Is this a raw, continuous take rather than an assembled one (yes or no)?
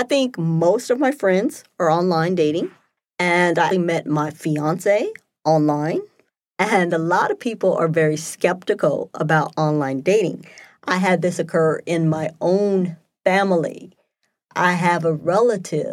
no